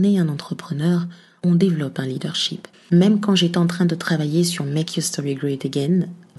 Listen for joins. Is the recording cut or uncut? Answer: cut